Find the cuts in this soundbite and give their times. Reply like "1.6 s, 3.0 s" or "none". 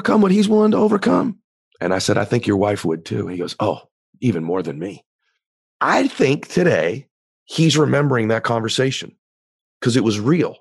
1.6 s